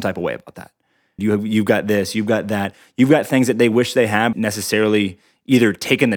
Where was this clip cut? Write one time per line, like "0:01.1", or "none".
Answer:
0:01.2
0:04.3